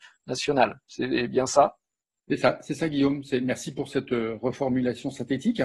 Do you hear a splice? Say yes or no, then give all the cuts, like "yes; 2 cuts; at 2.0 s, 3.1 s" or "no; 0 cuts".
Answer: no; 0 cuts